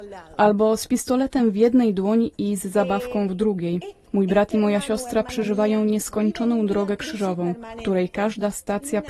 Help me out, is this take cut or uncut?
uncut